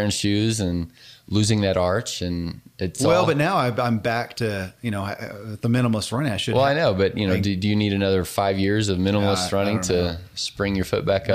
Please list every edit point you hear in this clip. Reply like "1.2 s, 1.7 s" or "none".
none

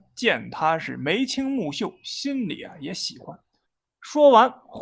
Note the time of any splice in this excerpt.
3.6 s

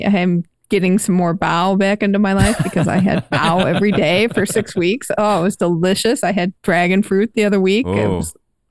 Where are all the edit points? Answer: none

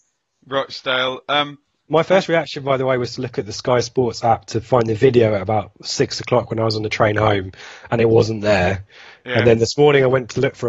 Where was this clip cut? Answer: none

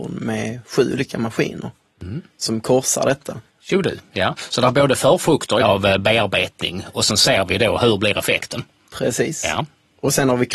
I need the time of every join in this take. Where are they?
5.6 s

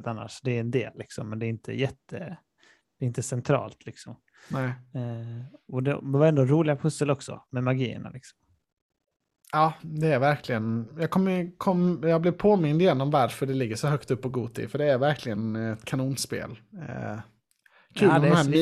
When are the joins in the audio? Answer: 9.8 s

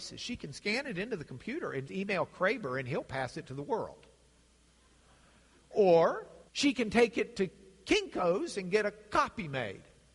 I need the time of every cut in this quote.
1.9 s, 6.5 s

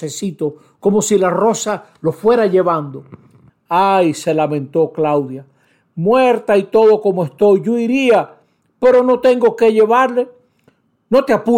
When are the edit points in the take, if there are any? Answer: 3.5 s

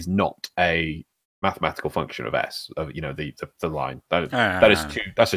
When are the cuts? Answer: 1.2 s

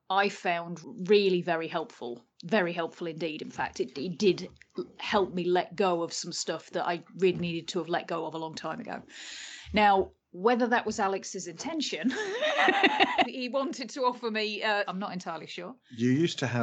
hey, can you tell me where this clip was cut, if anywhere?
13.2 s, 14.9 s

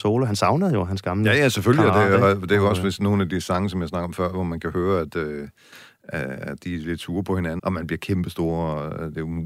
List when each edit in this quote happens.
7.6 s

